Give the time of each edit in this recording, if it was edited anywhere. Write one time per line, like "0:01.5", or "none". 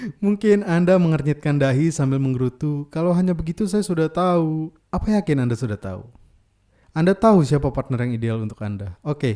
none